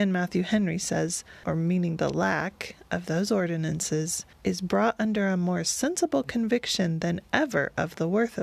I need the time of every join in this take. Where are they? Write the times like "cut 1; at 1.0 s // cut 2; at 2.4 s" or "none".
cut 1; at 1.4 s // cut 2; at 4.3 s